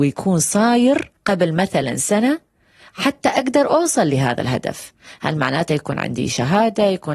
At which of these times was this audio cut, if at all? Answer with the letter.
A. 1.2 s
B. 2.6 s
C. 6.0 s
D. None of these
A